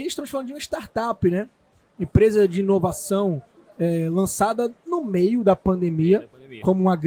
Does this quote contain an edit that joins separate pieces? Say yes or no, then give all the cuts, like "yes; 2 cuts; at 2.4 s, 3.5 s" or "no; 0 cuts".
no; 0 cuts